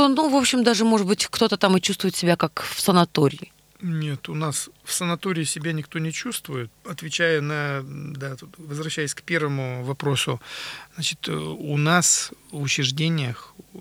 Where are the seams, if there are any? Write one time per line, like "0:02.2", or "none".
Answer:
0:06.7